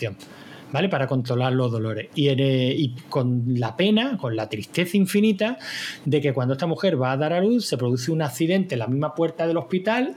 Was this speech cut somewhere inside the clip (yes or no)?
no